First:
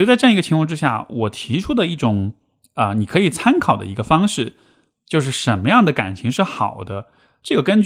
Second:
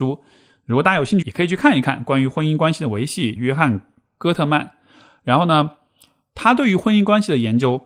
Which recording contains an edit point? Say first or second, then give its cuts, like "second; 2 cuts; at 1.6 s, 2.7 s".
second; 2 cuts; at 1.2 s, 3.4 s